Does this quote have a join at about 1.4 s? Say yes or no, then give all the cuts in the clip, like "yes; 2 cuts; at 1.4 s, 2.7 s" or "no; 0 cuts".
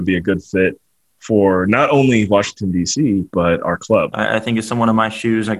no; 1 cut; at 4.1 s